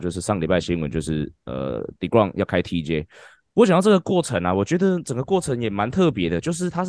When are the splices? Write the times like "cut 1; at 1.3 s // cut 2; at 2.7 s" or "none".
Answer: none